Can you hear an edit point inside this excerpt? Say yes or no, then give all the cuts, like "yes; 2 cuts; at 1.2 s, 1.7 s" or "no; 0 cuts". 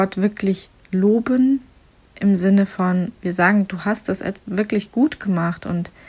no; 0 cuts